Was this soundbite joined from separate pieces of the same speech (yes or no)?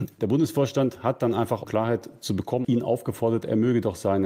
yes